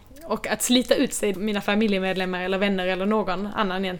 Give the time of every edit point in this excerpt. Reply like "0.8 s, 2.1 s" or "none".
1.3 s